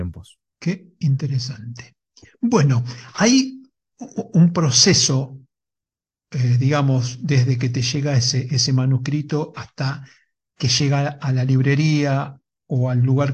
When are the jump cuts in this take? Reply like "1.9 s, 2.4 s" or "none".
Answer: none